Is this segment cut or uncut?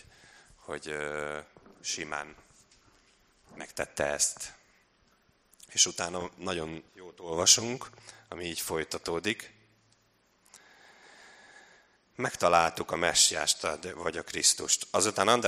cut